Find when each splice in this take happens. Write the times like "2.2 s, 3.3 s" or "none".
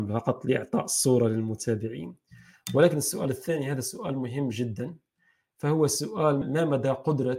6.4 s

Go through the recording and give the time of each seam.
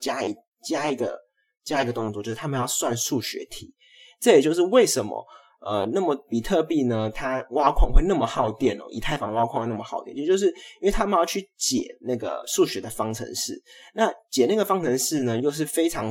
none

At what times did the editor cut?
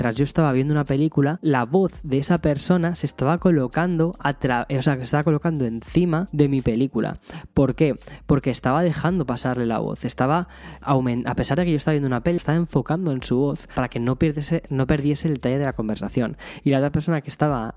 12.4 s

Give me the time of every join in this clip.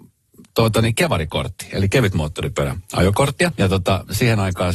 3.5 s

